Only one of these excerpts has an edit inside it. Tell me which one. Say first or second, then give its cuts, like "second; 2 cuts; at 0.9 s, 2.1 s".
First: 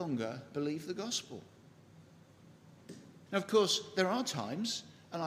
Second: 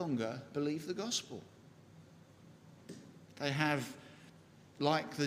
first; 1 cut; at 3.3 s